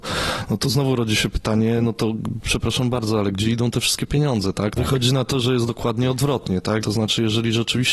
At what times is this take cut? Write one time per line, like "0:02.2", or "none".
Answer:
0:04.8
0:06.8